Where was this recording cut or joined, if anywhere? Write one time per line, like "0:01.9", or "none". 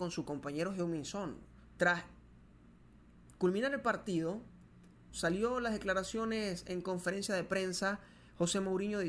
0:01.7
0:05.1